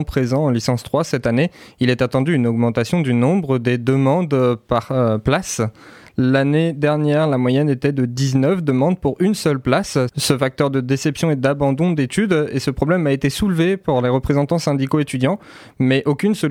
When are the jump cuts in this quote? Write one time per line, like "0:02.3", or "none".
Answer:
0:10.1